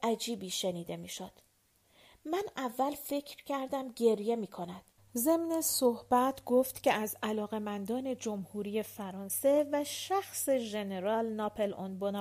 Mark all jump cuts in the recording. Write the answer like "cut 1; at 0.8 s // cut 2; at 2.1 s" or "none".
cut 1; at 5.0 s